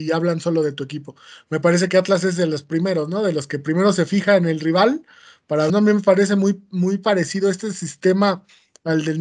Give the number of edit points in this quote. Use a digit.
1